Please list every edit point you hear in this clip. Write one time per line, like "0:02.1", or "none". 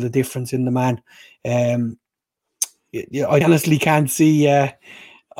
0:03.4